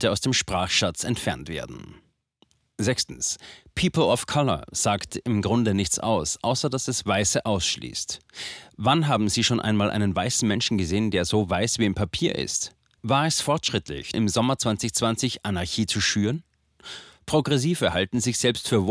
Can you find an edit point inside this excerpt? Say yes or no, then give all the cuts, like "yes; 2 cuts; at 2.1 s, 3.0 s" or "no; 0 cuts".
yes; 2 cuts; at 13.0 s, 14.1 s